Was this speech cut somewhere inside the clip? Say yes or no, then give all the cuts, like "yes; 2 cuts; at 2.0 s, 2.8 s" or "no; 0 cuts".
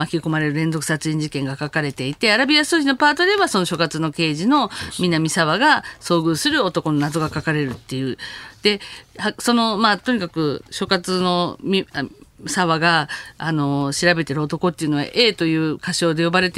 no; 0 cuts